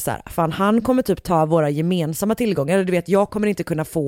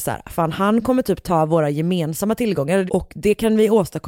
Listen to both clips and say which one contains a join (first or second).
second